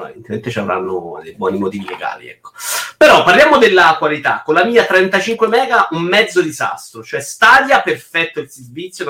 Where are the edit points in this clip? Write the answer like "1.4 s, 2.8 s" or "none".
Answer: none